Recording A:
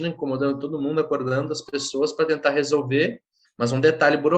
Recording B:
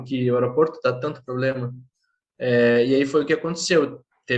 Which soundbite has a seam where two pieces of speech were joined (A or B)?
A